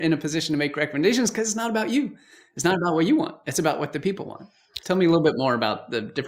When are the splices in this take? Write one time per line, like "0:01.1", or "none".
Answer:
0:04.8